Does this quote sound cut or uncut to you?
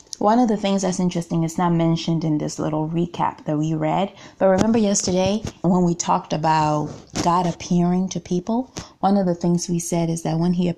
cut